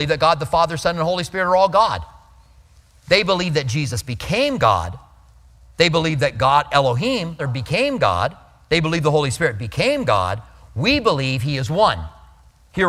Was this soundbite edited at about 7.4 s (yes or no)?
yes